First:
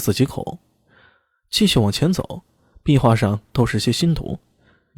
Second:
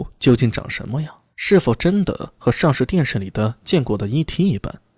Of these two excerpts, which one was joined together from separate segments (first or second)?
second